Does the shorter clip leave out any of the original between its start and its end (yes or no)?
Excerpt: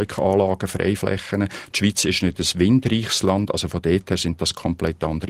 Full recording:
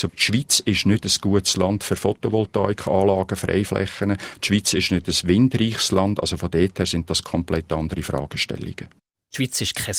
no